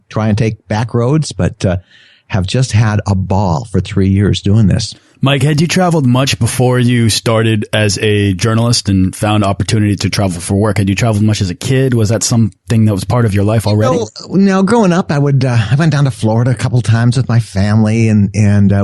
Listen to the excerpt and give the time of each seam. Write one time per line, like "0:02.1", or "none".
none